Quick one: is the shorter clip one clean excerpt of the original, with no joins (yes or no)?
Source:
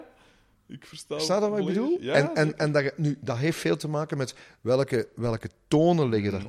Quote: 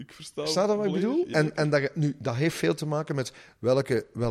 no